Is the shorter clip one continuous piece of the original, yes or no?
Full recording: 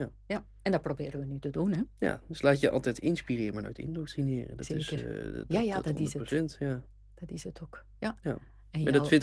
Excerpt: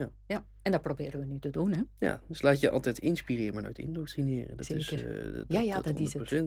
yes